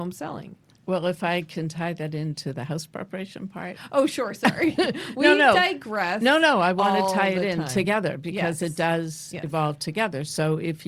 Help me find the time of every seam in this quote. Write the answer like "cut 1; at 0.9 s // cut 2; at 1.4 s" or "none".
none

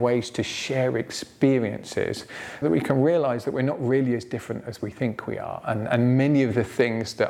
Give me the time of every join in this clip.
cut 1; at 2.6 s

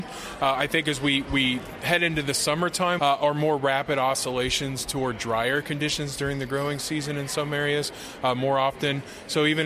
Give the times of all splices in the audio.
cut 1; at 3.0 s

